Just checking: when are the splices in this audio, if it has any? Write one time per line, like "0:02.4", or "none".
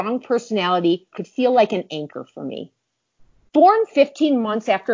0:01.1